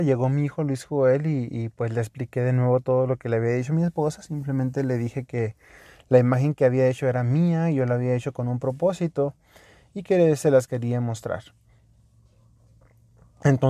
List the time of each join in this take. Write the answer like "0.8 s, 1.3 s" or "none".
none